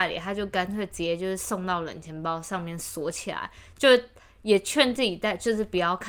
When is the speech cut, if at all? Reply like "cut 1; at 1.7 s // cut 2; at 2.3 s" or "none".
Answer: none